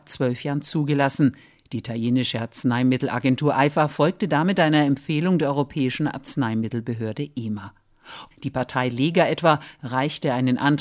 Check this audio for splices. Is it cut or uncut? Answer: cut